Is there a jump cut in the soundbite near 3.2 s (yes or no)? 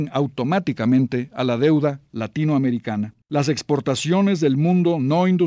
yes